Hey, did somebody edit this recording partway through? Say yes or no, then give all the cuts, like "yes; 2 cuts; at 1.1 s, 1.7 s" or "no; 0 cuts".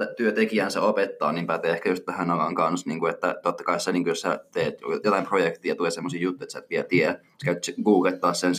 no; 0 cuts